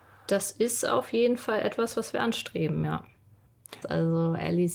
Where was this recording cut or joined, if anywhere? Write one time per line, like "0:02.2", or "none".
0:03.8